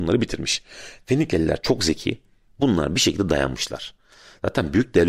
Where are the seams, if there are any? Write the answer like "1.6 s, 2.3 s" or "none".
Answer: none